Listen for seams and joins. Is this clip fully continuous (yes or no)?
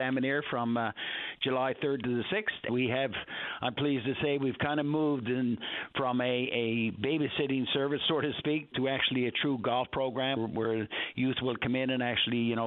no